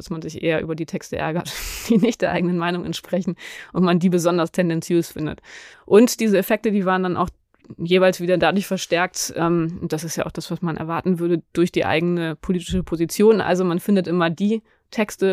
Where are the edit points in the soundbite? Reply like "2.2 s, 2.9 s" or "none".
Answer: 5.7 s